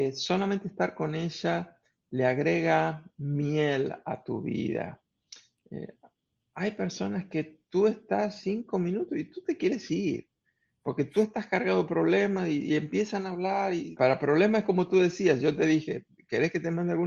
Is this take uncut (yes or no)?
no